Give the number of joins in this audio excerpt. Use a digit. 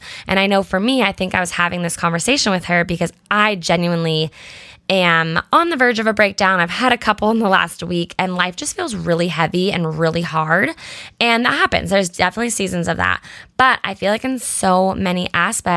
0